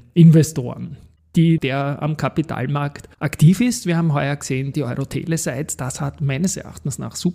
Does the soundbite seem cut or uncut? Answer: cut